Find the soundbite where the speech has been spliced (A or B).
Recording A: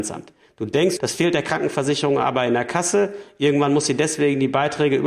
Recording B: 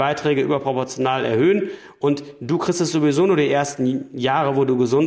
A